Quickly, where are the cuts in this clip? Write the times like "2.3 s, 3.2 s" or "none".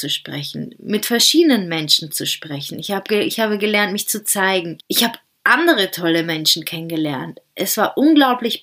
4.8 s